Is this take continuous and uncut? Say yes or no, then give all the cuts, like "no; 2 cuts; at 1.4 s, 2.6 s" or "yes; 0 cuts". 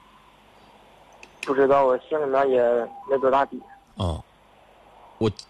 no; 1 cut; at 3.0 s